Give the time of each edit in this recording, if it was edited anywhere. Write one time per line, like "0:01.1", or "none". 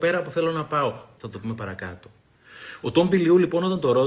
0:01.2